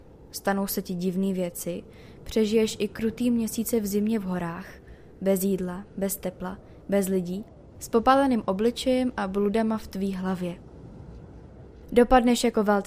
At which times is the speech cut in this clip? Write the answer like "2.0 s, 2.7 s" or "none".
none

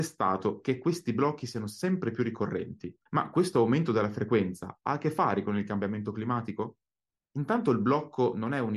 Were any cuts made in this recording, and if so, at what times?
3.1 s, 7.1 s

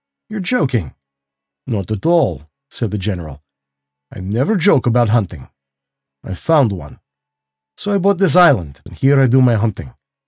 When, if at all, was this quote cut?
6.1 s, 8.9 s

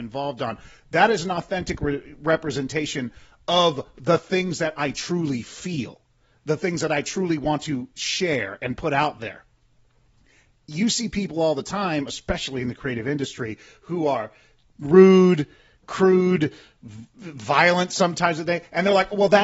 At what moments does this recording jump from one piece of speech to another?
none

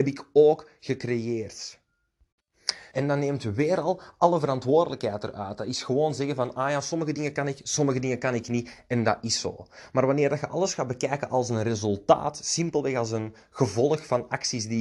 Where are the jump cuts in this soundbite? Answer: 2.9 s

